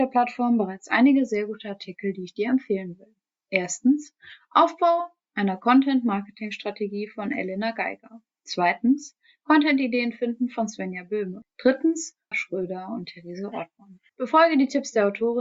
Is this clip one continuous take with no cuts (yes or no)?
no